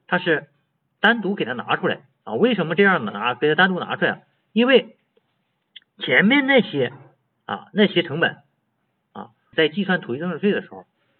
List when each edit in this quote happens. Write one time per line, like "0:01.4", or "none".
0:09.5